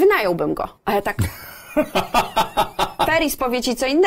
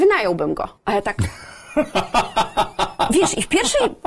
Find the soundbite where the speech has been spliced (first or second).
first